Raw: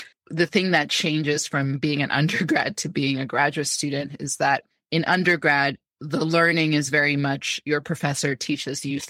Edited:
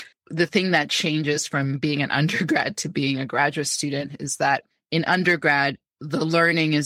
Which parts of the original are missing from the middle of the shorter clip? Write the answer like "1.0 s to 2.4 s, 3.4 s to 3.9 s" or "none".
none